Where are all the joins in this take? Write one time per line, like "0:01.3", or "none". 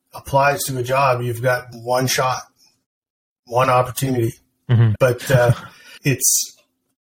0:05.0
0:06.0

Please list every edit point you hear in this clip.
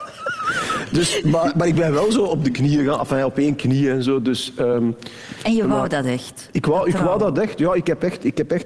none

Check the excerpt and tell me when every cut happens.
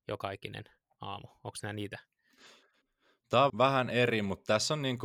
0:03.5

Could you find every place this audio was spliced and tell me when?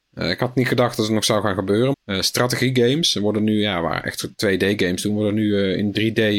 0:01.9

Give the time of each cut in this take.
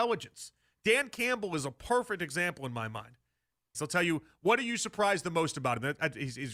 0:03.7

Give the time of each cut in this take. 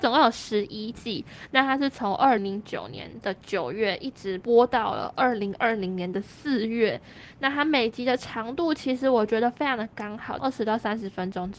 0:02.4
0:10.4

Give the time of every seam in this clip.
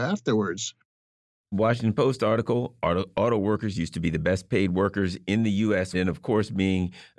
0:05.9

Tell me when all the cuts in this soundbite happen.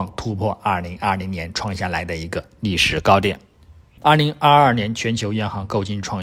0:04.0

